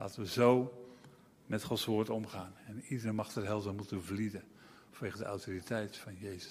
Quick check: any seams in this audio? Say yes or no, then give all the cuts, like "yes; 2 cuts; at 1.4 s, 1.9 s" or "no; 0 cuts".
yes; 1 cut; at 2.6 s